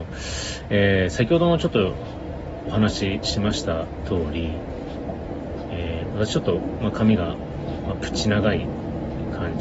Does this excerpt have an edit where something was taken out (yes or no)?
no